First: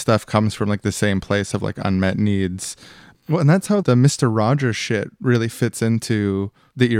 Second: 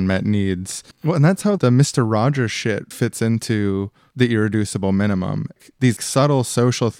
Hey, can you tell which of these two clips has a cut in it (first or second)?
second